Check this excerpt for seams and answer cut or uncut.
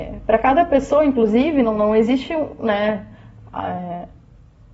uncut